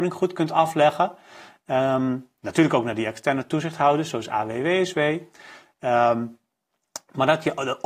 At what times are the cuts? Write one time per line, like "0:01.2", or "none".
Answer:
none